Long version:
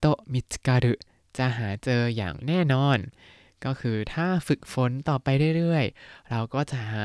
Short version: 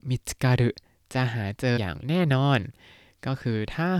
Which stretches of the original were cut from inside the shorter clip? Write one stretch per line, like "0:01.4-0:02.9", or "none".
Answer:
0:02.0-0:02.1